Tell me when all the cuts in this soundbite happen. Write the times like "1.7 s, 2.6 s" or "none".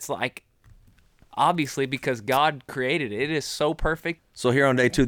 4.2 s